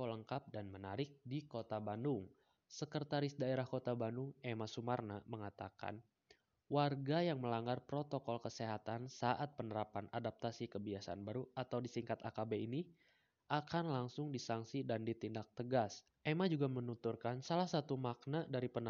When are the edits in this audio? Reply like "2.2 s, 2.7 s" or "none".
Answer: 2.6 s, 16.1 s